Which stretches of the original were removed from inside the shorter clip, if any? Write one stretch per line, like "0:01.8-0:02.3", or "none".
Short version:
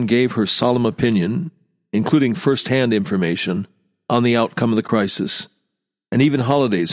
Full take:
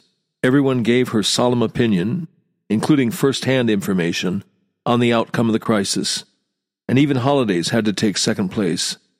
none